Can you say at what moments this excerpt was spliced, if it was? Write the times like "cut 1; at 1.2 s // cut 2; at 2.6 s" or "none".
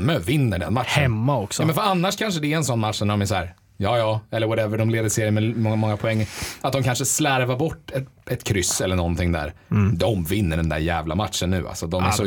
none